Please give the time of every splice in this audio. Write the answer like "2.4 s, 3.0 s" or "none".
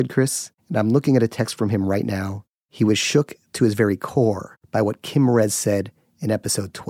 none